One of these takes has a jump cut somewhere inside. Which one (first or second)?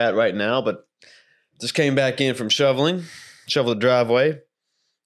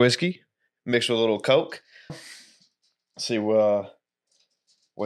second